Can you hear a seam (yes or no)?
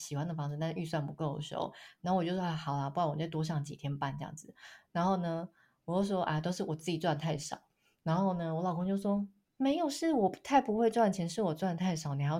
no